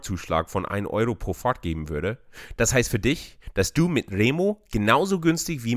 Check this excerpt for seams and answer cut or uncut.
cut